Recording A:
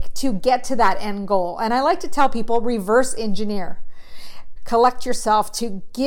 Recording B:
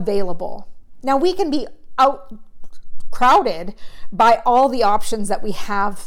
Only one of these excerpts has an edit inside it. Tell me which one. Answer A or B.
A